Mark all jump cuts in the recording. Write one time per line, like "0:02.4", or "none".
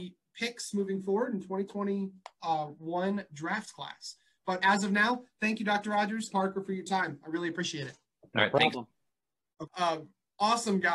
0:06.3
0:09.7